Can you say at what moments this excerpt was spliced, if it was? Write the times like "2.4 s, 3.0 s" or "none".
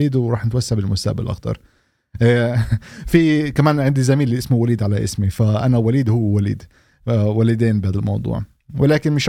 none